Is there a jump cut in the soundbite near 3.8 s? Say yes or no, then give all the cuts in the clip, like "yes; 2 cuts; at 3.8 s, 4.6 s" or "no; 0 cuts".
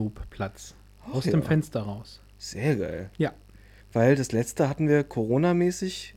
yes; 1 cut; at 3.8 s